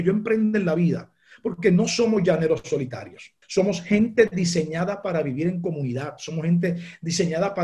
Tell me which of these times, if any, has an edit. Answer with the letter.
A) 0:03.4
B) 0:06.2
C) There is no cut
A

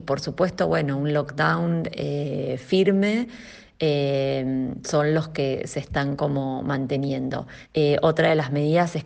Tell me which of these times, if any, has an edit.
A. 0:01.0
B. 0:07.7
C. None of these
B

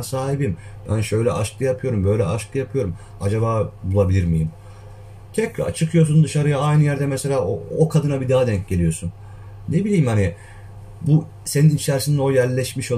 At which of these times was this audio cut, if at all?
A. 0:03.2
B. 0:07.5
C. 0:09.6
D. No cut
A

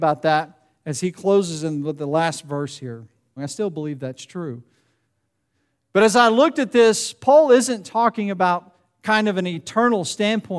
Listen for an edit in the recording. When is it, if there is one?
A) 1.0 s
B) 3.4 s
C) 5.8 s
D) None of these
B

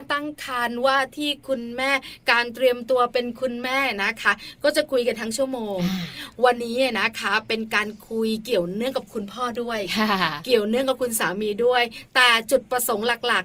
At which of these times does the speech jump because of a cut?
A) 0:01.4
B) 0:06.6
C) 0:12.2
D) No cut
B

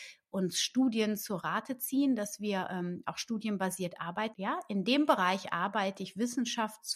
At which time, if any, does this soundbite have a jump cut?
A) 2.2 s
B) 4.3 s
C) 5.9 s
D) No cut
B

